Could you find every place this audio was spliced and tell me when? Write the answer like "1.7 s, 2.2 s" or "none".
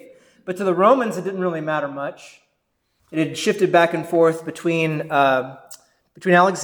3.0 s